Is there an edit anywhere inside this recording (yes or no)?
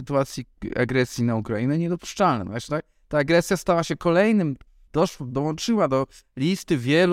no